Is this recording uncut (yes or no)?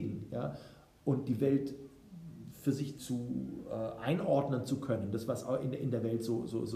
no